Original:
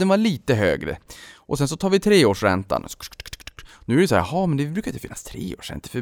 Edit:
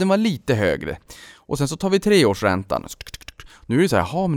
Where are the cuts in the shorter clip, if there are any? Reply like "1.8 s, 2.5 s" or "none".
3.0 s